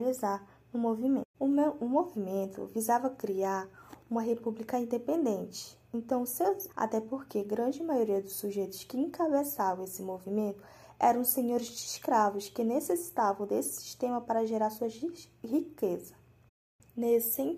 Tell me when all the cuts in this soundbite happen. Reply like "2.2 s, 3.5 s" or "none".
1.3 s, 6.7 s